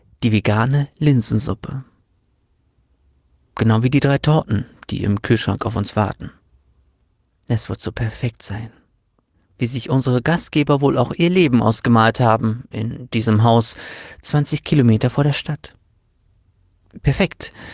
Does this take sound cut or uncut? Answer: uncut